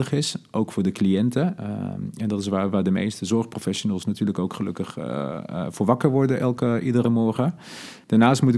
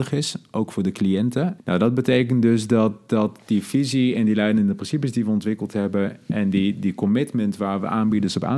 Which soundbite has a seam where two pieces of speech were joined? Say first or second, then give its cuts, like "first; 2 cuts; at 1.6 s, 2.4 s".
second; 1 cut; at 1.6 s